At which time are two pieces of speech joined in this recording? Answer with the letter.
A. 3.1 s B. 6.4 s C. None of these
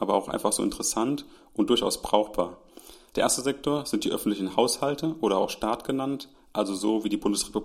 A